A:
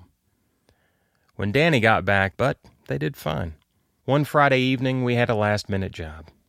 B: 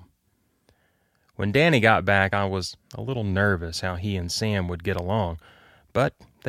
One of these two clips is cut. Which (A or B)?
A